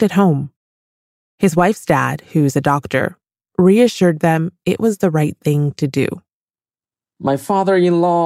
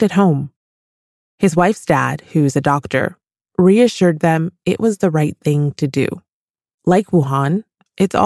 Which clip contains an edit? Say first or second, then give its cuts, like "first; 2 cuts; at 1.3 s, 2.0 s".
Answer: second; 1 cut; at 6.7 s